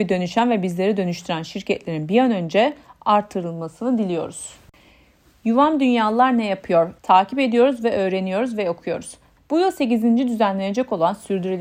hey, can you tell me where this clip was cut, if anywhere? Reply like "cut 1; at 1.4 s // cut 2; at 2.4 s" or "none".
cut 1; at 7.0 s // cut 2; at 9.4 s